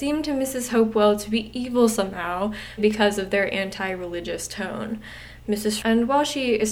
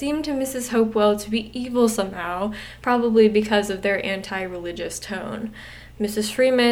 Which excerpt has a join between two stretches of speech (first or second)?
first